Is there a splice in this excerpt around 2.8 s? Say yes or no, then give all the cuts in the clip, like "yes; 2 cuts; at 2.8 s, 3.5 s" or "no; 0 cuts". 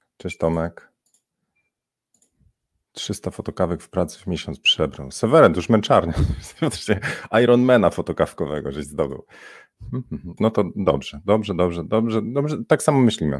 no; 1 cut; at 10.4 s